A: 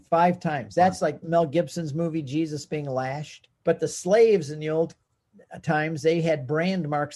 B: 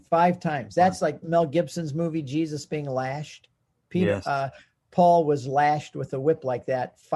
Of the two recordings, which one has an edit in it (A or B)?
A